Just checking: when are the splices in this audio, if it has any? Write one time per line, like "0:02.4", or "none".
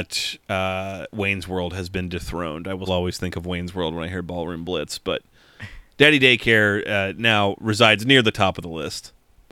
0:02.9

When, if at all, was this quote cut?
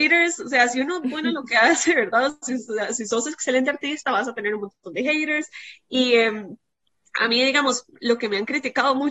none

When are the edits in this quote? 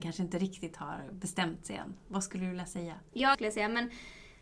0:03.3

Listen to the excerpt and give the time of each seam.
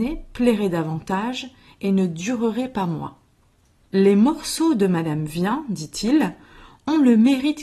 0:03.9

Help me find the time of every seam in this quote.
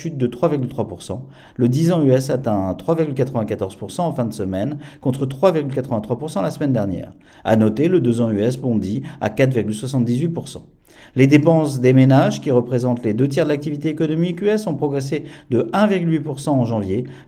0:01.5

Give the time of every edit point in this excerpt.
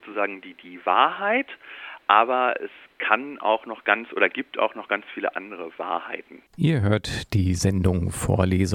0:06.5

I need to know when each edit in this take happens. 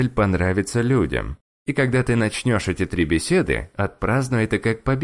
0:01.5

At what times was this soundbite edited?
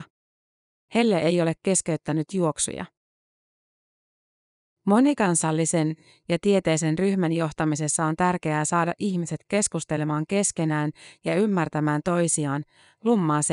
none

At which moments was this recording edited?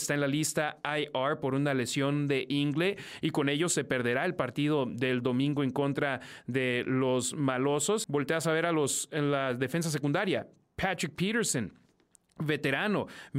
0:08.0

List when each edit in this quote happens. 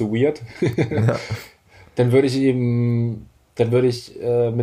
none

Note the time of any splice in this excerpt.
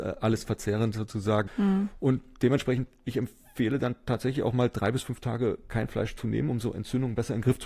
0:01.5

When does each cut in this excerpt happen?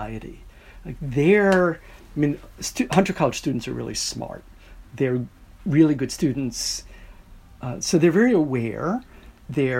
0:04.8

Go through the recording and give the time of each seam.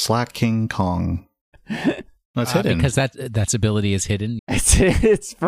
0:01.5
0:04.4

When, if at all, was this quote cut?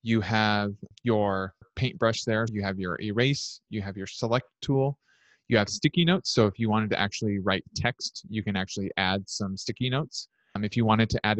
0:02.5

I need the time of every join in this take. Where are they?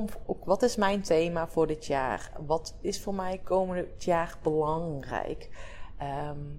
none

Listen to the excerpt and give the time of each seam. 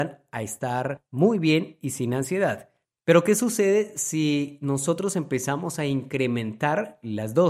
none

